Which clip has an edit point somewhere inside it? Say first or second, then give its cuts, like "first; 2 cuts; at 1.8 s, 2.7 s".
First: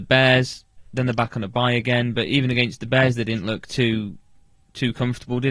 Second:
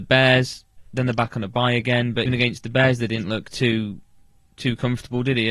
second; 1 cut; at 2.3 s